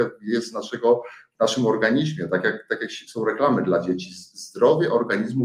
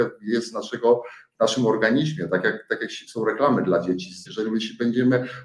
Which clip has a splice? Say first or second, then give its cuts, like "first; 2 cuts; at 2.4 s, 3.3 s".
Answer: second; 1 cut; at 4.3 s